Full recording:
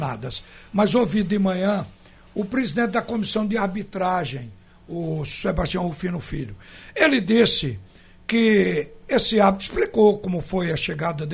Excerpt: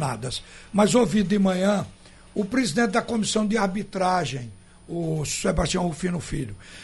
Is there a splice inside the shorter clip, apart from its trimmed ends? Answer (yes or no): no